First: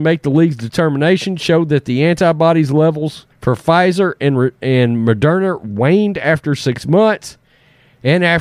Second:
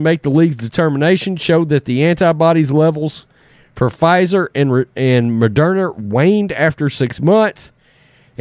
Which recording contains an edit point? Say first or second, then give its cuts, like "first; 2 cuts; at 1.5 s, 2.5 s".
first; 1 cut; at 3.3 s